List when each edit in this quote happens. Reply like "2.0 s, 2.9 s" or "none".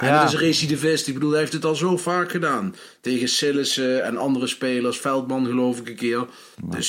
none